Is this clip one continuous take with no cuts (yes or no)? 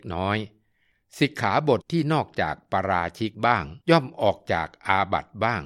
no